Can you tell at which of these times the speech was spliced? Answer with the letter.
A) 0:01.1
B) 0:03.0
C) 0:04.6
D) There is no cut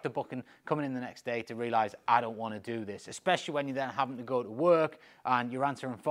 D